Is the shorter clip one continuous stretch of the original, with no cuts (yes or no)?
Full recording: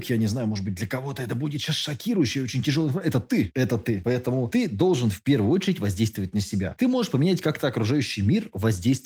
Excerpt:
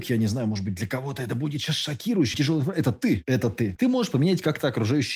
no